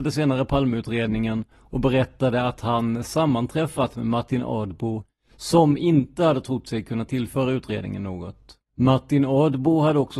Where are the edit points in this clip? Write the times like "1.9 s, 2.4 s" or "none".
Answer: 8.6 s